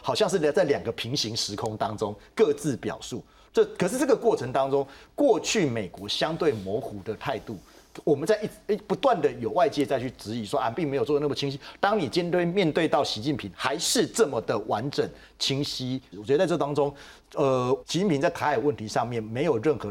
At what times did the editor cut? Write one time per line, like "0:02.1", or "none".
0:10.7
0:16.1
0:17.8

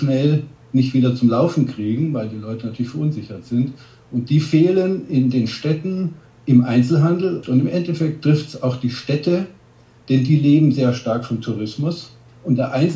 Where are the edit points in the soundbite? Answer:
0:07.4

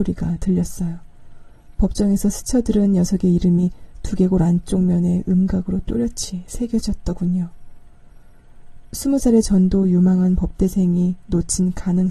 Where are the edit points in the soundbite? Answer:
0:08.8

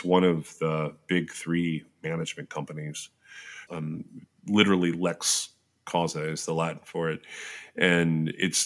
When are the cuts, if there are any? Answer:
0:03.7

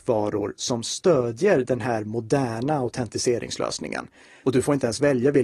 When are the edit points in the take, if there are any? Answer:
0:04.4

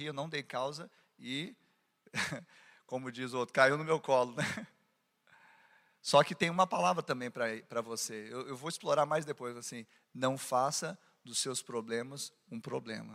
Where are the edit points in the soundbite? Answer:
none

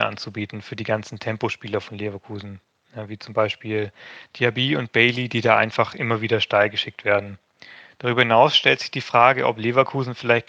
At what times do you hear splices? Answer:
none

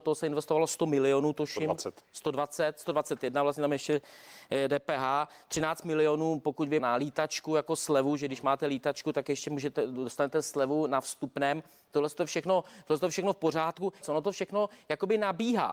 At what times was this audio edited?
0:06.8
0:14.0

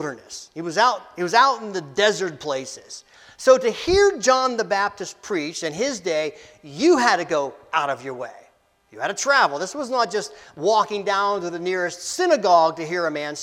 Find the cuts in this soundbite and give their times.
none

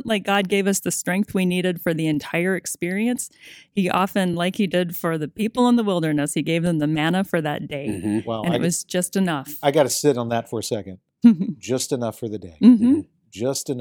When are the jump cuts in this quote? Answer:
none

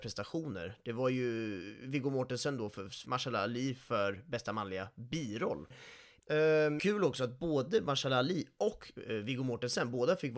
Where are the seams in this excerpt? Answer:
0:03.0
0:06.2

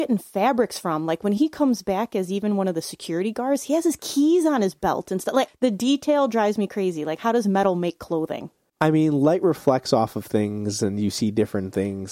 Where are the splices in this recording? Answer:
0:05.5

